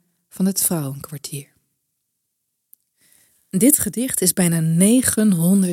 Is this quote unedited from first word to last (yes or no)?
yes